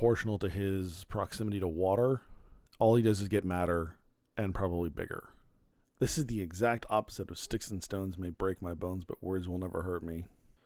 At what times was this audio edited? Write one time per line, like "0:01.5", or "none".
0:02.7